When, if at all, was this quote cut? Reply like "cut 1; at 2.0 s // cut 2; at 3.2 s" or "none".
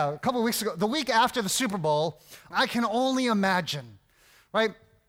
cut 1; at 2.5 s